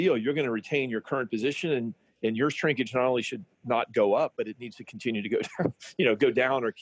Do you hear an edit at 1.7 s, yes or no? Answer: no